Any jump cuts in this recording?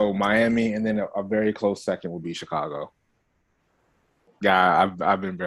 no; 0 cuts

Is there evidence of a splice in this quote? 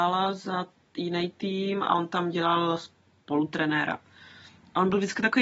no; 0 cuts

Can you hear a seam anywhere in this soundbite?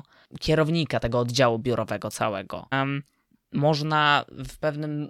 yes; 1 cut; at 2.7 s

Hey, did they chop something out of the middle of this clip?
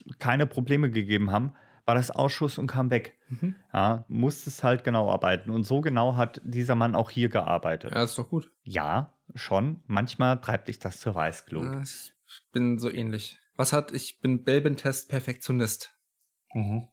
yes; 2 cuts; at 4.1 s, 8.6 s

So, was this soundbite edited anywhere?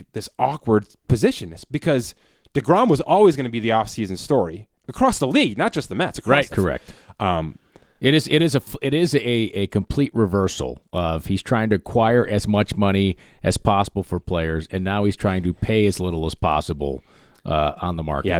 yes; 1 cut; at 6.5 s

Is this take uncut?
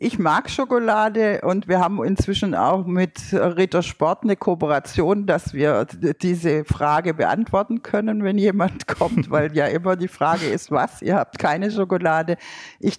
yes; 0 cuts

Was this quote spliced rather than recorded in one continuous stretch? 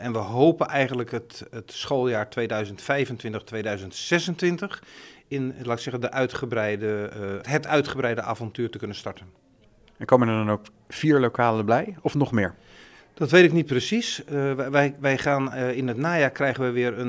yes; 1 cut; at 7.4 s

